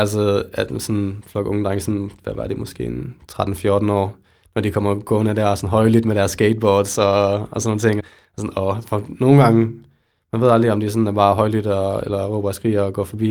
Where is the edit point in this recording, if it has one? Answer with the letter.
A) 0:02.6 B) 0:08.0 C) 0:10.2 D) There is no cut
B